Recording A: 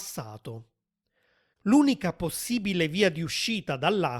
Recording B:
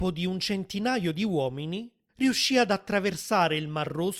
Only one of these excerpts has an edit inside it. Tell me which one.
A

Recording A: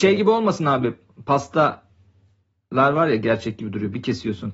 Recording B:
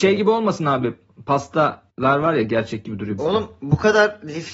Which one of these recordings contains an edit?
B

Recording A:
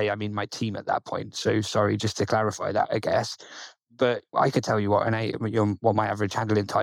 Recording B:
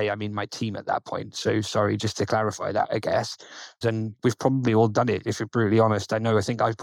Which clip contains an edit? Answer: B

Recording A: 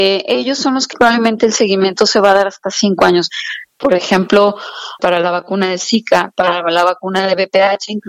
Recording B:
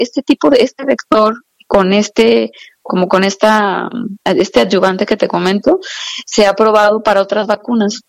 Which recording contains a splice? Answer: A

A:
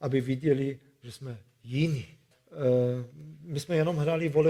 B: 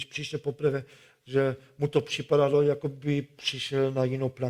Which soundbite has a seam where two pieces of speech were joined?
A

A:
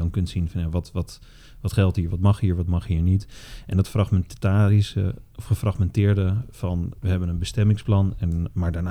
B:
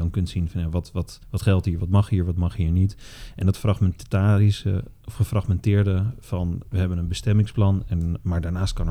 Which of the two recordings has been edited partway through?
B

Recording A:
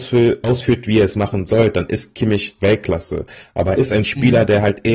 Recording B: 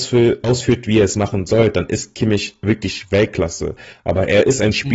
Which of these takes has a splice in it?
A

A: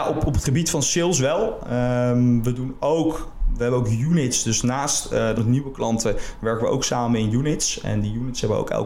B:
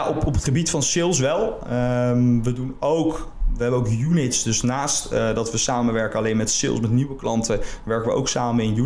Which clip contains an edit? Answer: A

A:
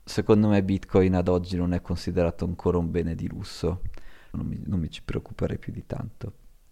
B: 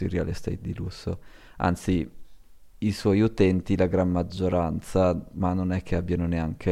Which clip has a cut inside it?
A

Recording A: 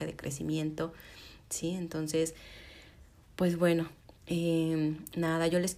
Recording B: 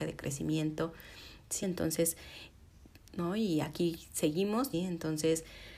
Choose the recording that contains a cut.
B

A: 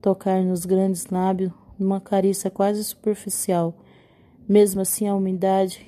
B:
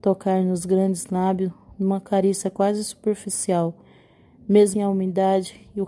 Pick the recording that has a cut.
B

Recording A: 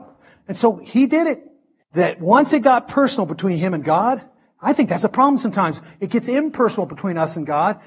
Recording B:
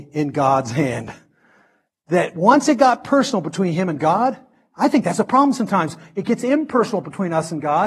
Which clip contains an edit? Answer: A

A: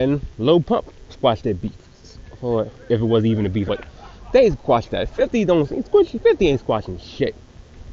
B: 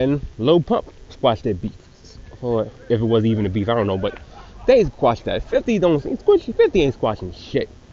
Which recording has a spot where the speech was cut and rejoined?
A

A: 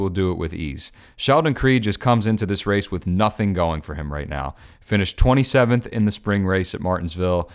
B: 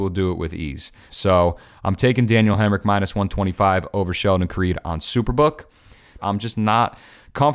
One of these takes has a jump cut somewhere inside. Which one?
B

